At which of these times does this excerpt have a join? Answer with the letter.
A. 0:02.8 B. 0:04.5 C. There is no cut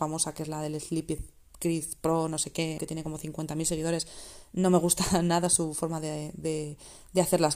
A